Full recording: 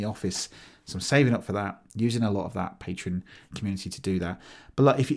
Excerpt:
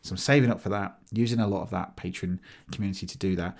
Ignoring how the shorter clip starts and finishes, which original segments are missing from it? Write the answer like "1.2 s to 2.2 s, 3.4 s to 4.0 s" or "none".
none

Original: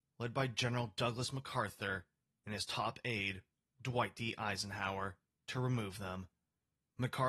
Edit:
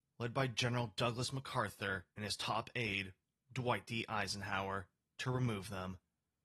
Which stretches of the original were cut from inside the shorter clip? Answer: 2.1 s to 2.4 s

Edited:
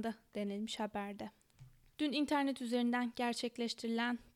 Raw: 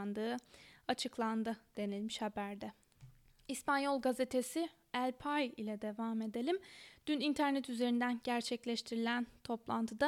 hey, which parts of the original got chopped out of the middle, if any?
3.3 s to 7.0 s

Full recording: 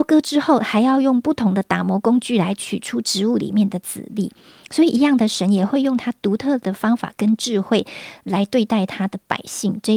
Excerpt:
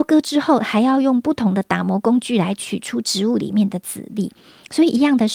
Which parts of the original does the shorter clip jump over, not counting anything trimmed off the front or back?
none

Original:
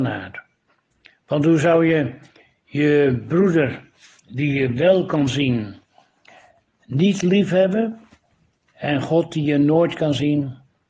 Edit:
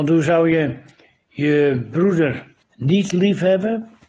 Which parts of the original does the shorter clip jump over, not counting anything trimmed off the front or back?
4.0 s to 6.7 s

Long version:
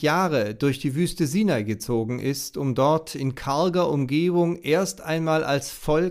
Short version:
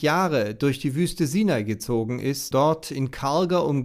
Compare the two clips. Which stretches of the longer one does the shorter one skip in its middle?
2.5 s to 2.8 s

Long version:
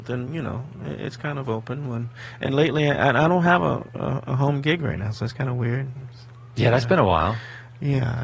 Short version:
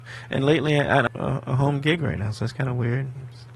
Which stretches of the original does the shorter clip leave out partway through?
3.2 s to 3.9 s

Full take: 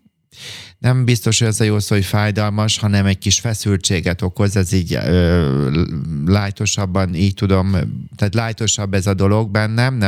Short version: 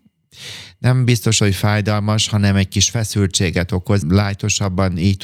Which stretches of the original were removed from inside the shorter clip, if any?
1.4 s to 1.9 s, 4.5 s to 6.2 s

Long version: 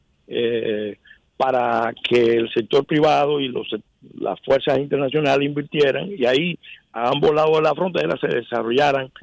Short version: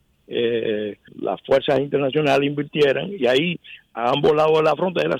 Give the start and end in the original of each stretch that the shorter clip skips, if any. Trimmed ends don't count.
1.1 s to 4.1 s

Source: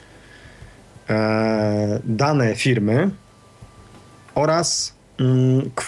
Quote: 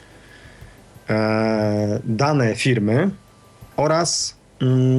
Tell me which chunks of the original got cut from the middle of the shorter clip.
3.7 s to 4.3 s

